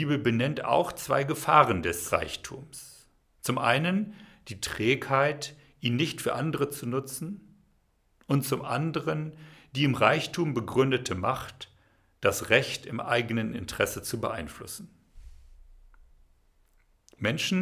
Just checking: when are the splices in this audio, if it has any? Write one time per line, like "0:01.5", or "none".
none